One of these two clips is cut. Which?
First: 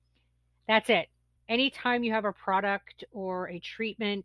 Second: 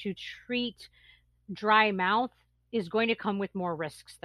first; 1 cut; at 1.4 s

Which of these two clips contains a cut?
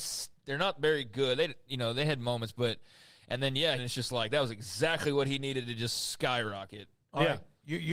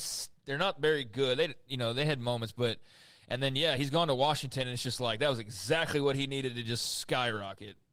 first; 1 cut; at 3.8 s

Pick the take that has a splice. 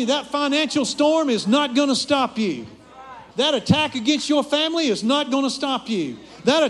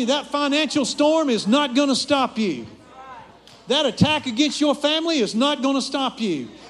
first; 1 cut; at 3.3 s

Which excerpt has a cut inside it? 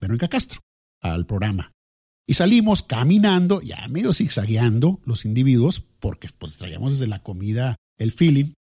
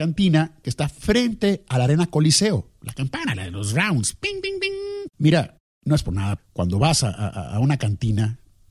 second; 2 cuts; at 5.1 s, 6.4 s

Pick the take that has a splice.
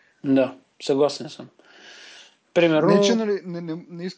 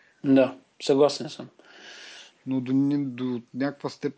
second; 1 cut; at 2.3 s

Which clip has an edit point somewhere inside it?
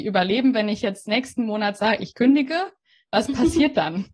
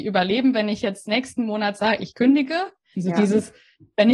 second; 1 cut; at 2.9 s

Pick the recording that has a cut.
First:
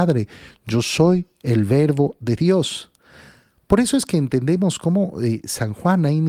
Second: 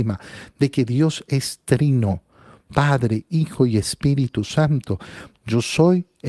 second; 1 cut; at 5.3 s

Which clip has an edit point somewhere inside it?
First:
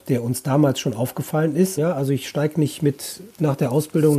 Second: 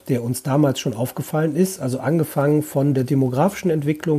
first; 1 cut; at 1.8 s

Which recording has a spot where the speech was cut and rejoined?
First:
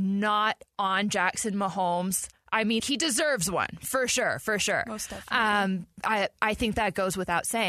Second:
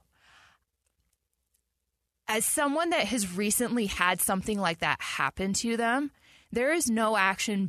first; 1 cut; at 2.8 s

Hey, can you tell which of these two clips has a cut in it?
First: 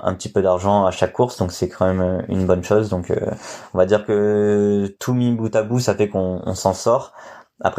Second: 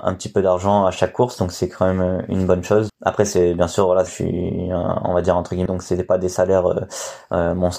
second; 3 cuts; at 2.9 s, 4.1 s, 5.7 s

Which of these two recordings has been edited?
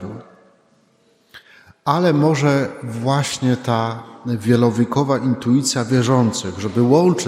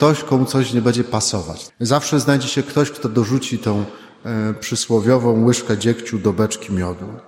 second; 1 cut; at 1.7 s

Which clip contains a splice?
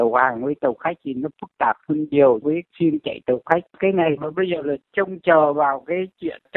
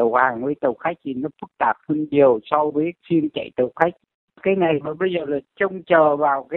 first; 2 cuts; at 2.4 s, 3.7 s

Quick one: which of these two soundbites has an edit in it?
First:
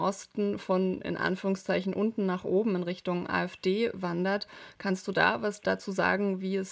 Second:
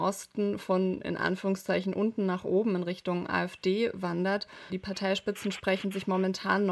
second; 1 cut; at 4.7 s

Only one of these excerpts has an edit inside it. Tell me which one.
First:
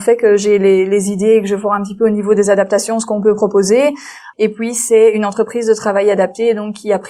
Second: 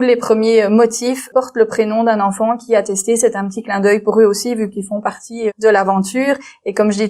first; 1 cut; at 4.3 s

